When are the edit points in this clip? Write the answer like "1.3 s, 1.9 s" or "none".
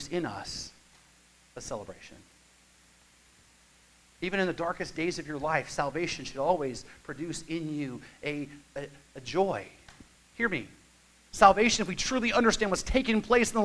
none